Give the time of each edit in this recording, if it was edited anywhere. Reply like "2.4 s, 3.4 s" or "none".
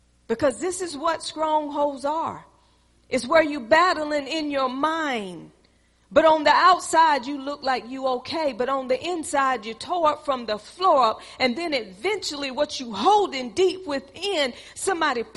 none